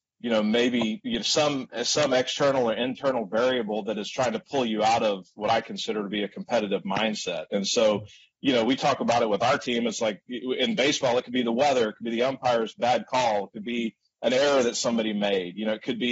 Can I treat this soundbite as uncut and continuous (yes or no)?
yes